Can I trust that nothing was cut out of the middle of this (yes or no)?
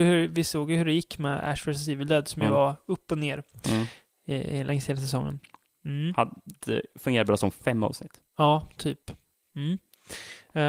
yes